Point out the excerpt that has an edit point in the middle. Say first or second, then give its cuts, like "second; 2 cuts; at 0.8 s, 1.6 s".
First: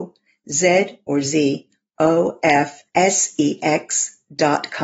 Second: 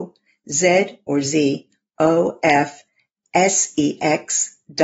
first; 1 cut; at 2.9 s